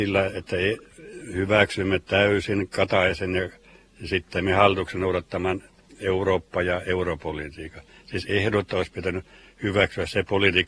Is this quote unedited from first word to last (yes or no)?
yes